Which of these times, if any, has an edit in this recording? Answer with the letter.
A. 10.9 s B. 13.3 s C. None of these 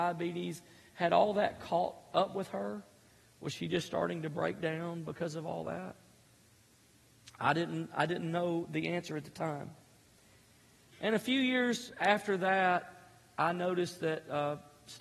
A